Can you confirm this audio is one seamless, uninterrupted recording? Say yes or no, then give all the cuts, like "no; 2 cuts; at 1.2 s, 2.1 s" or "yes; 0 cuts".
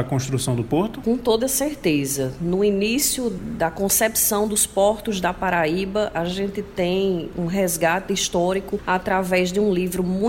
yes; 0 cuts